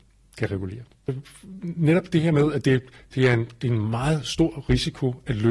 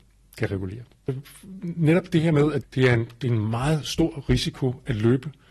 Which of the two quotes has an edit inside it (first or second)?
second